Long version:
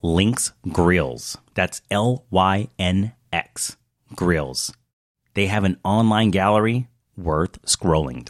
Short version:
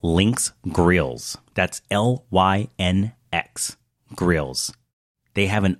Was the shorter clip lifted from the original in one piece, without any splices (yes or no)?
yes